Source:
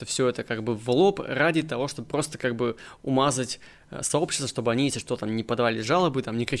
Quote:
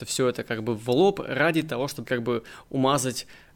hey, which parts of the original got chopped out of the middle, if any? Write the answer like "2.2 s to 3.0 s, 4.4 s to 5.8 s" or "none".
2.1 s to 2.4 s